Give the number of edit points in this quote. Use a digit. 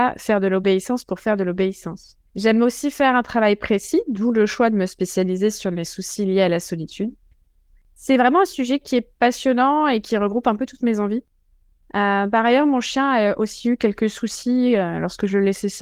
1